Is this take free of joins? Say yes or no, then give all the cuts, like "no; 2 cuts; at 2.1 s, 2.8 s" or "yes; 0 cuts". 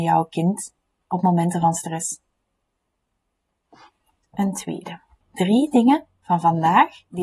no; 1 cut; at 5.2 s